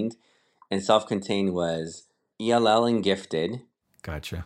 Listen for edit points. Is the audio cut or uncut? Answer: cut